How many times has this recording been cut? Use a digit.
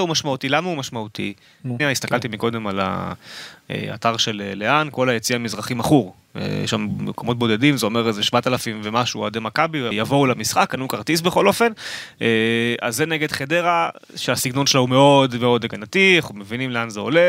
2